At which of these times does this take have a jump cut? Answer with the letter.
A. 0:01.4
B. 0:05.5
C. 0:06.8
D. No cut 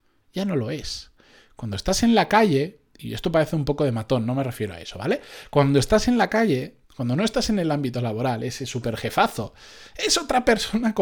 C